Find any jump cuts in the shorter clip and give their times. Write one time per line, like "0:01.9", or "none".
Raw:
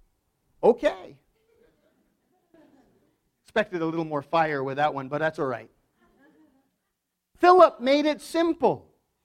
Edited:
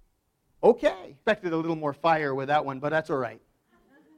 0:01.2